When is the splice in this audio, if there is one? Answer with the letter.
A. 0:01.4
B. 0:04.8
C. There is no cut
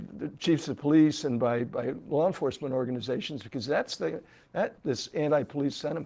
B